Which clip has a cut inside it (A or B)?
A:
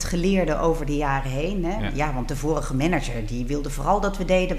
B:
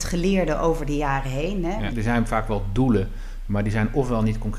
B